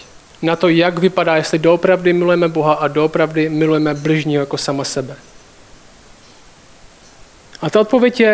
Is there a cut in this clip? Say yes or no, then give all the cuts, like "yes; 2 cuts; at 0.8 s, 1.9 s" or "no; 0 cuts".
no; 0 cuts